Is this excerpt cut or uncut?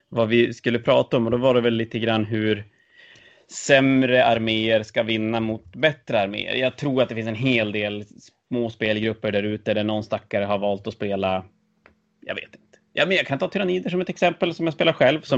uncut